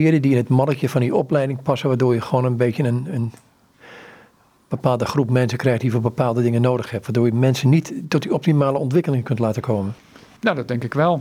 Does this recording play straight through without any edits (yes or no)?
yes